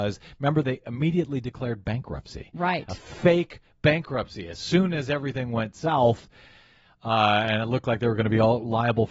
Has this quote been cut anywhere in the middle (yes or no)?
no